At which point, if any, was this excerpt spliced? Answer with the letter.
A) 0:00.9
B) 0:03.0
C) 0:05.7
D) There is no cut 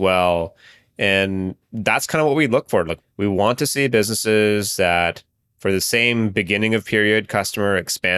B